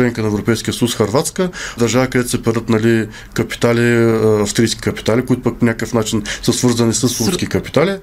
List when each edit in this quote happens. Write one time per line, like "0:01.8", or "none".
0:01.8